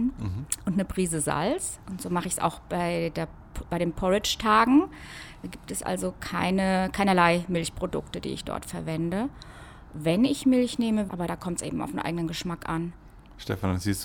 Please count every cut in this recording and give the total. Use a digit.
1